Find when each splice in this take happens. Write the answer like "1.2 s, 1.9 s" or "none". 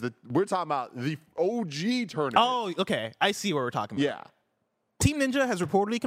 5.0 s